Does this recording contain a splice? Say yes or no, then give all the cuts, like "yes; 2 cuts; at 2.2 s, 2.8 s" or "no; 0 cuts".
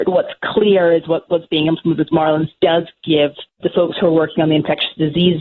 no; 0 cuts